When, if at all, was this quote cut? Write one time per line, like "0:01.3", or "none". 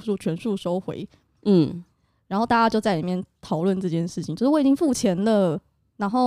none

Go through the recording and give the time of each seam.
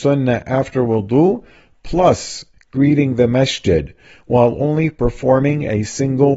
none

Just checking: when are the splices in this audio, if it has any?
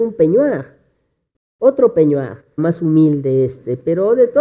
0:02.6

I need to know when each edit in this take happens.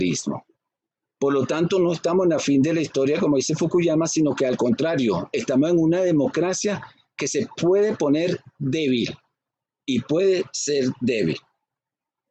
none

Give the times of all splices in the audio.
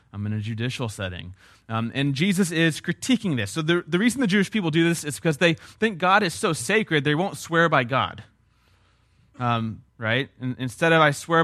0:09.9

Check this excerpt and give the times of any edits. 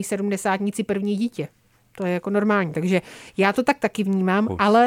none

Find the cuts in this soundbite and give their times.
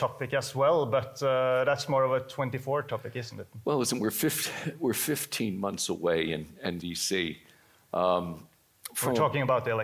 0:06.8

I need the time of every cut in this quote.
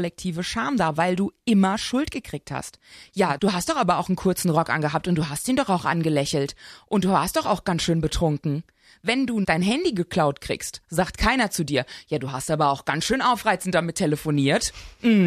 none

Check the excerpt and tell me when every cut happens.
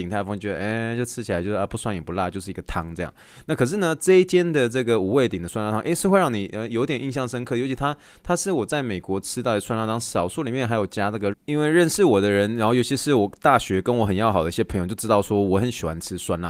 0:11.3

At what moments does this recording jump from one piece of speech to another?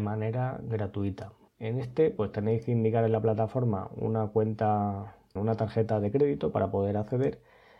0:01.5
0:05.4

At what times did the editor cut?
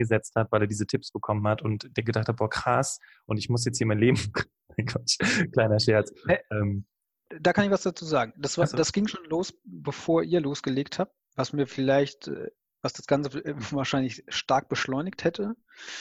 0:11.2

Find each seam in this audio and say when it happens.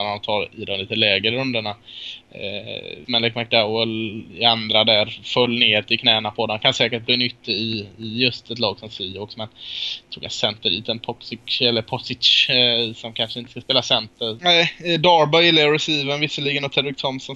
0:03.0
0:14.4

